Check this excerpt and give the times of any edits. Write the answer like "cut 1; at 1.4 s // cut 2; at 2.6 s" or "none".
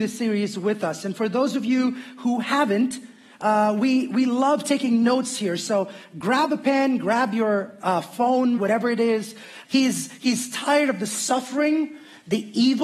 cut 1; at 8.6 s // cut 2; at 9.6 s